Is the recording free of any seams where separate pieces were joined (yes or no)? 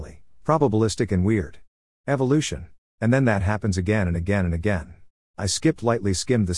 no